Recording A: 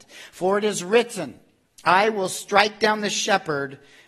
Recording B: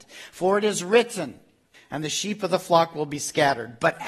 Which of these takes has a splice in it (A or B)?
B